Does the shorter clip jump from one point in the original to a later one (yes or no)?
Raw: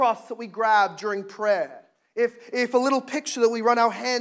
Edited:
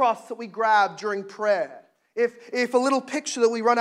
no